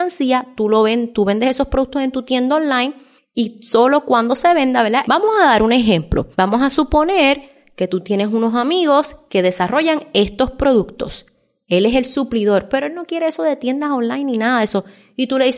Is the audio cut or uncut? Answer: cut